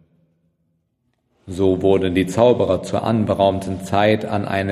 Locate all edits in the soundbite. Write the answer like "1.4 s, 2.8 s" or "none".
none